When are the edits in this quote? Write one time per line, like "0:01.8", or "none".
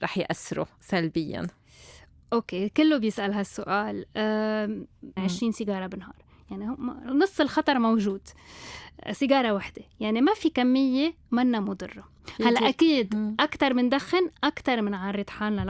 0:05.2